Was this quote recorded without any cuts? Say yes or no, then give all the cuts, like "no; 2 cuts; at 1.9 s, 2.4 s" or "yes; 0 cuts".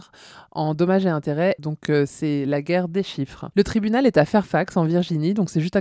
no; 1 cut; at 1.6 s